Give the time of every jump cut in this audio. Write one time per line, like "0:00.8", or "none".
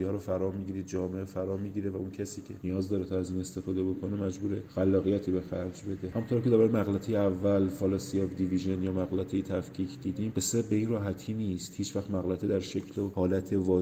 none